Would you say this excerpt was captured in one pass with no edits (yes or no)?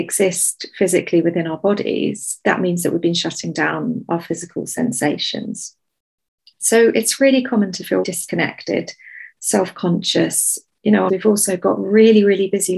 no